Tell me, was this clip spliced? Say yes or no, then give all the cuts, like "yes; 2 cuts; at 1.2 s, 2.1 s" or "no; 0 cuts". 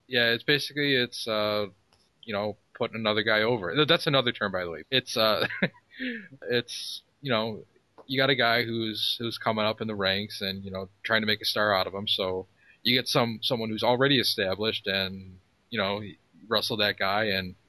yes; 2 cuts; at 4.8 s, 6.4 s